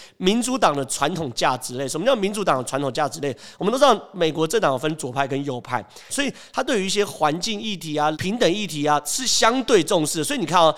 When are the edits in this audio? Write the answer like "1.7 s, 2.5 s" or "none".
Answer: 6.1 s, 8.1 s